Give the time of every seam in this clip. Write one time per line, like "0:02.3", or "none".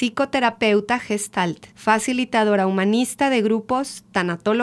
0:01.7